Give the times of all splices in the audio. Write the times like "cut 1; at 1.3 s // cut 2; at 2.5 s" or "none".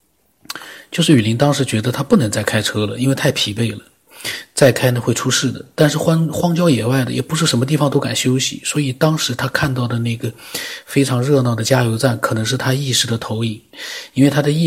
none